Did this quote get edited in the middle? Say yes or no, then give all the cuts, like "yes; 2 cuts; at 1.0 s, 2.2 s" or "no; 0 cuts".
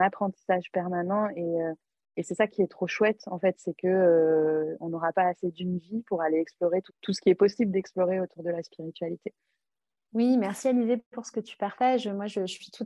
no; 0 cuts